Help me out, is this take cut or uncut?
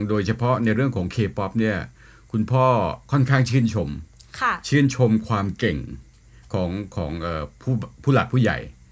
uncut